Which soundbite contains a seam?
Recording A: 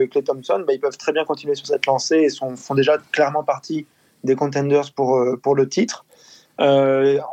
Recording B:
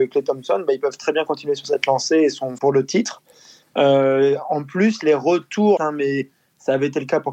B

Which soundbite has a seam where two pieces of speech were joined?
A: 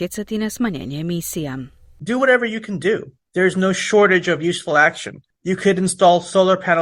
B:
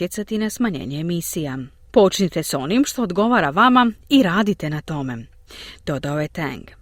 B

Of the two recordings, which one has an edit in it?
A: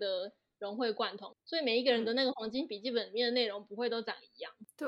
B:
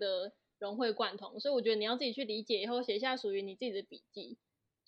A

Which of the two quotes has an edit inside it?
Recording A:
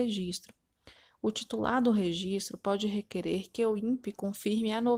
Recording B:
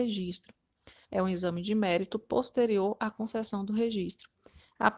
B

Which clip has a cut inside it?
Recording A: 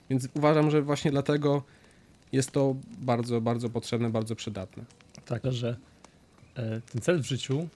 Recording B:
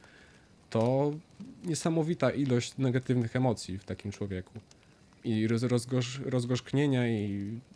A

